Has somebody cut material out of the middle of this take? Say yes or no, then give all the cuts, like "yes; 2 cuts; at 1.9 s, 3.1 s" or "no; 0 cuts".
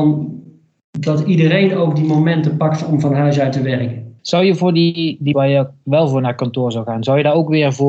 yes; 1 cut; at 5.3 s